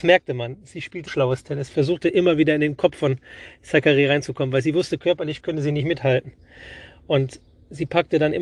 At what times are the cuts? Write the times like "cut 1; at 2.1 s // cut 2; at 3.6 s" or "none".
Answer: cut 1; at 1.1 s